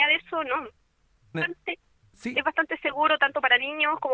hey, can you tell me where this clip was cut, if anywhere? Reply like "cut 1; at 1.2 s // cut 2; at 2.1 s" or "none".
cut 1; at 1.3 s